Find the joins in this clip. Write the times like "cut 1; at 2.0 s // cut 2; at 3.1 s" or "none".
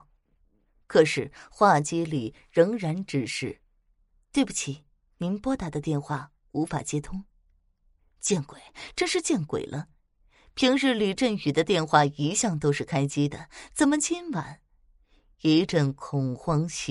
none